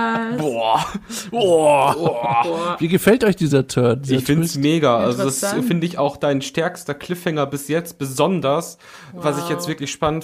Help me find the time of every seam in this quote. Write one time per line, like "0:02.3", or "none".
none